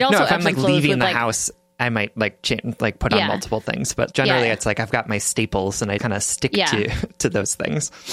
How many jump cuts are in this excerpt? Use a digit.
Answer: 2